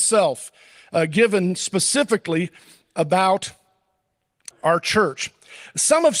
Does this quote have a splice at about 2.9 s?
no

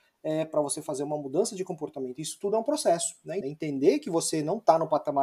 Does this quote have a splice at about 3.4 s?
yes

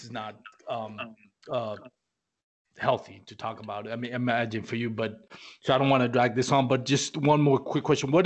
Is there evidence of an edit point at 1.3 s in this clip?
no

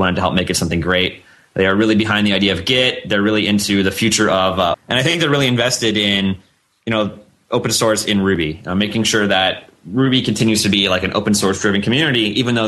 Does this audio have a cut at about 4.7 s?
yes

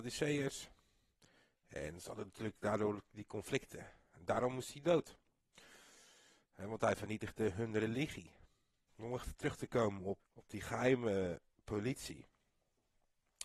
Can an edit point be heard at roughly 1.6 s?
no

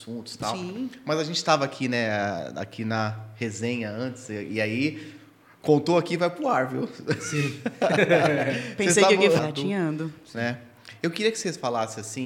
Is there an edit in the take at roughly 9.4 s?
yes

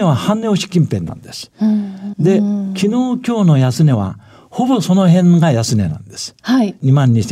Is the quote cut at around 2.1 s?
yes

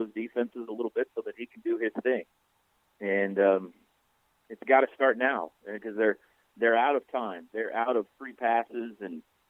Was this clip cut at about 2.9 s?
no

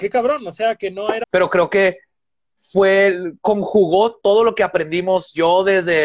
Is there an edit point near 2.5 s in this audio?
no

